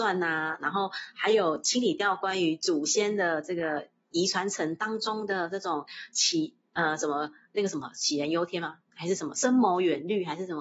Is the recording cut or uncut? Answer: uncut